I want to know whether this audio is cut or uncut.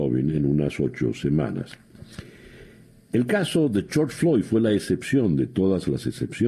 uncut